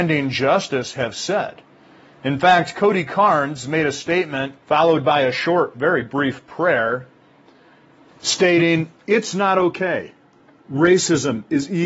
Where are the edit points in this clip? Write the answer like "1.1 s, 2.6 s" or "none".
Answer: 4.6 s